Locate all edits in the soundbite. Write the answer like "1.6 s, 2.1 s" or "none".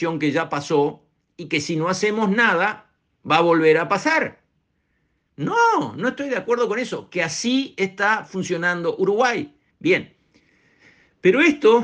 5.3 s, 9.7 s